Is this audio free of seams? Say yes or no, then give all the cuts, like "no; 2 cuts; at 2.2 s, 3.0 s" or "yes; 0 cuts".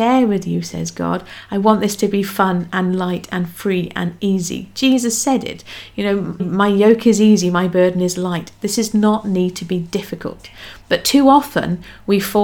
no; 1 cut; at 6.4 s